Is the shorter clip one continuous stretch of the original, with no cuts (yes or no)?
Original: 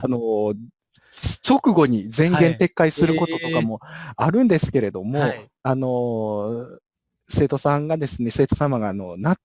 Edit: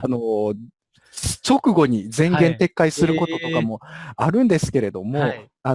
yes